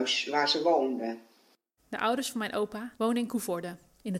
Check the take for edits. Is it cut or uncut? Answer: cut